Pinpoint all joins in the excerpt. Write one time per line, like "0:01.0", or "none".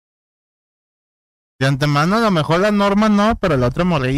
none